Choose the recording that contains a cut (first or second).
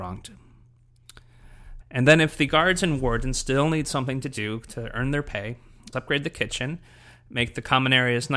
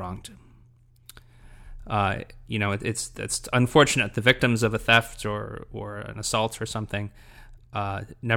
first